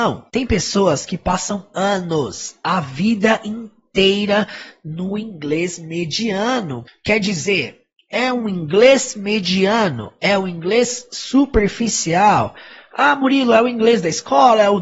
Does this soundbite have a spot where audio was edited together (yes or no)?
yes